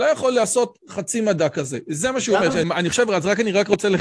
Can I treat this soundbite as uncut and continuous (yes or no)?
no